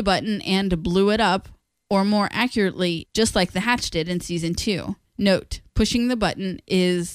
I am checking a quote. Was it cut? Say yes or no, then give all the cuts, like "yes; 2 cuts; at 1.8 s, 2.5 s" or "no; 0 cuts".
yes; 1 cut; at 3.1 s